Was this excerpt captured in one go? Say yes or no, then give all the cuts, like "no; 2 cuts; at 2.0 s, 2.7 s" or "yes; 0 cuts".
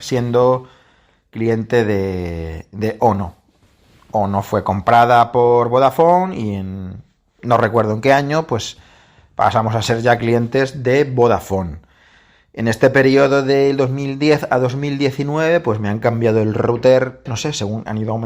no; 1 cut; at 17.3 s